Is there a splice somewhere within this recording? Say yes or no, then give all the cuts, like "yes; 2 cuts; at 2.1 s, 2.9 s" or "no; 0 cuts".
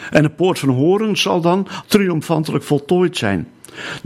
yes; 1 cut; at 1.8 s